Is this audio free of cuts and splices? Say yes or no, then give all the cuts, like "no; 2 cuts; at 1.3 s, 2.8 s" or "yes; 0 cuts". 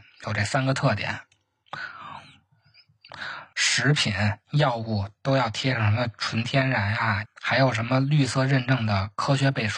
no; 2 cuts; at 3.5 s, 7.3 s